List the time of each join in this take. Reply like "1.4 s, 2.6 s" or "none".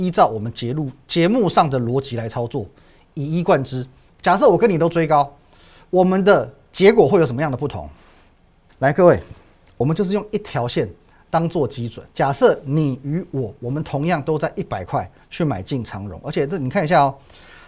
4.1 s, 8.7 s, 12.1 s